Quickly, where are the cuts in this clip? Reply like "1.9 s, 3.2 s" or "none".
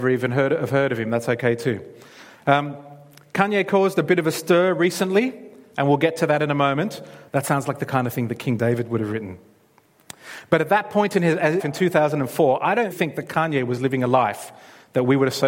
7.3 s, 11.6 s, 12.9 s